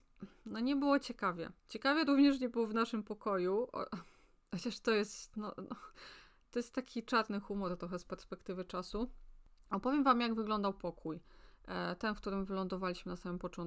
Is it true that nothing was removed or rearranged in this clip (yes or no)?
no